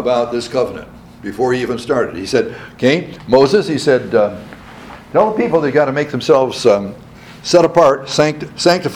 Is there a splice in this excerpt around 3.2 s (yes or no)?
no